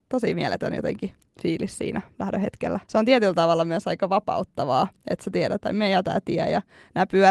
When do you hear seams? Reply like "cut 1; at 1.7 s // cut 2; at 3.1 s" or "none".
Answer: cut 1; at 2.8 s // cut 2; at 5.6 s